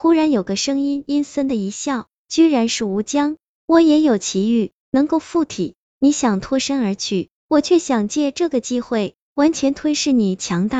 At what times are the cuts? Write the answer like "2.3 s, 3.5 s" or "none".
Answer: 1.3 s, 3.5 s